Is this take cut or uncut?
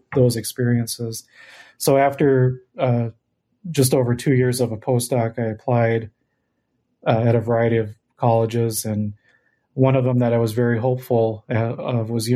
uncut